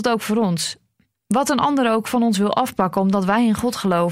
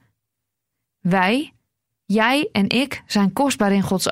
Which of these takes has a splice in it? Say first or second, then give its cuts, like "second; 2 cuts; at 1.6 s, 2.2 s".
second; 1 cut; at 0.9 s